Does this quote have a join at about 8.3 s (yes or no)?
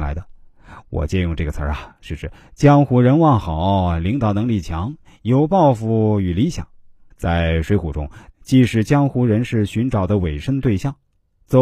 yes